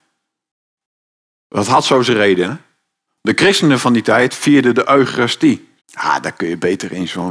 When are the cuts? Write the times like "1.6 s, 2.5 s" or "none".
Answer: 3.1 s, 5.8 s